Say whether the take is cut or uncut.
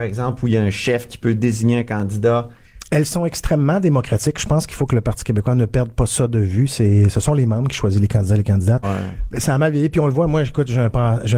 cut